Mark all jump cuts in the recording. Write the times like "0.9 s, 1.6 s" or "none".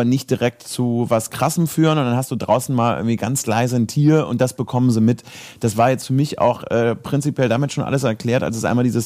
none